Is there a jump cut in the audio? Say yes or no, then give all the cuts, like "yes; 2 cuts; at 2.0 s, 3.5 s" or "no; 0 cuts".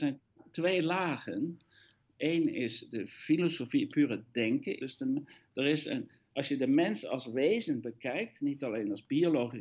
yes; 1 cut; at 4.8 s